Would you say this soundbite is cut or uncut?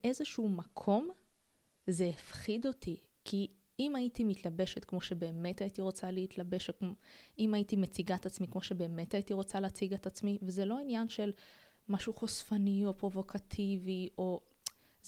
uncut